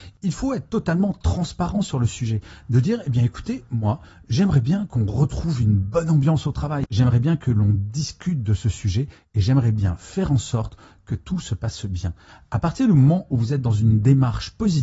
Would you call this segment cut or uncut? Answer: uncut